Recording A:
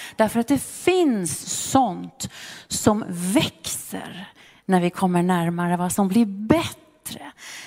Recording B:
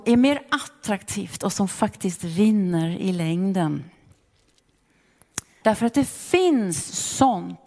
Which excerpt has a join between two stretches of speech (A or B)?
B